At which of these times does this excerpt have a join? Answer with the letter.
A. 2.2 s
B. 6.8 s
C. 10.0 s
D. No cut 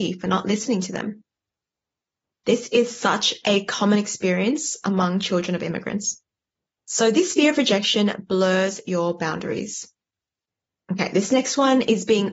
D